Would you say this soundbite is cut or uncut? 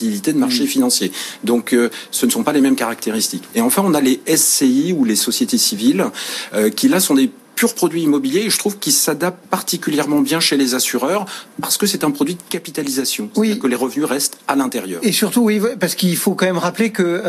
uncut